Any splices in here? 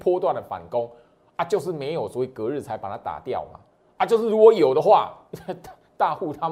no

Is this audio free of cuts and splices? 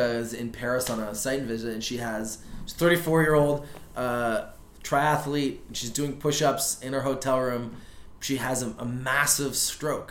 yes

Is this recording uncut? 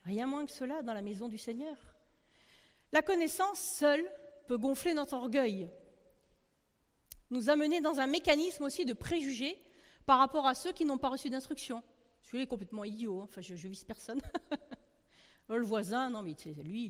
yes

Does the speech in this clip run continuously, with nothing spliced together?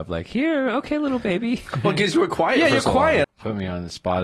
no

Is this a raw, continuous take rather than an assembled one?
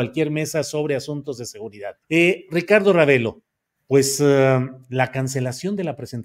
no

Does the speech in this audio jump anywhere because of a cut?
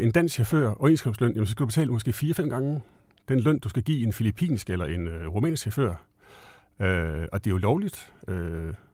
no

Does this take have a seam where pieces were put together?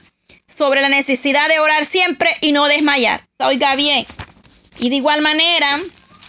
yes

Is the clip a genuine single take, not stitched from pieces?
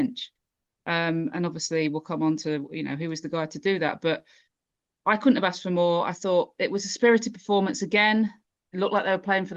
yes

